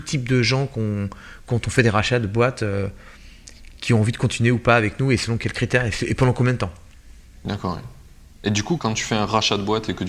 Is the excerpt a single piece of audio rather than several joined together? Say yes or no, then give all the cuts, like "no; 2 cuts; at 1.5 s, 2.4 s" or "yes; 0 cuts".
no; 1 cut; at 8.8 s